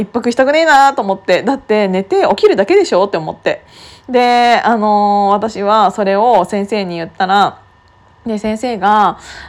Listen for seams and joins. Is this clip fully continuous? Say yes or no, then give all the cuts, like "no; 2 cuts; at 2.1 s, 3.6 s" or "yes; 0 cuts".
yes; 0 cuts